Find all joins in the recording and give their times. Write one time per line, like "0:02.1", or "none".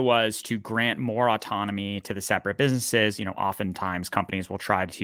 none